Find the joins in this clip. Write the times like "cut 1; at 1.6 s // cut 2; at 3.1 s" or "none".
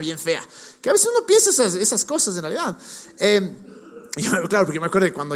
none